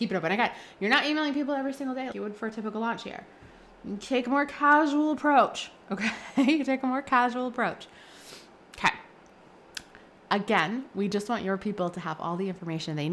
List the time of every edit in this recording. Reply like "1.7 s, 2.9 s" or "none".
2.1 s